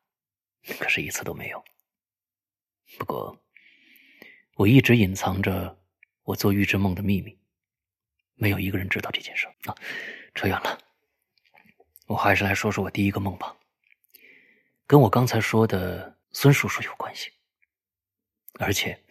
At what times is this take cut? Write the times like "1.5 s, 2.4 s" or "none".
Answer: 9.5 s, 16.2 s